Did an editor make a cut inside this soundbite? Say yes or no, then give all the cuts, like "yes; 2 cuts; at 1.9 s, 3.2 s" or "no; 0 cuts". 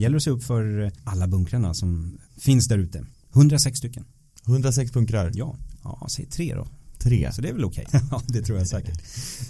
yes; 2 cuts; at 5.7 s, 7.9 s